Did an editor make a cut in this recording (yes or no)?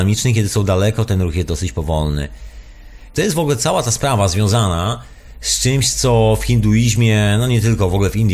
yes